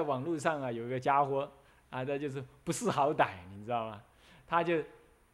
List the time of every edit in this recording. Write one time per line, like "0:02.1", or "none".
none